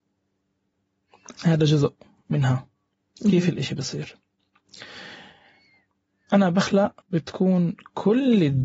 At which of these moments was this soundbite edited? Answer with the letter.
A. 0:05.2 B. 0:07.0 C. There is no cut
B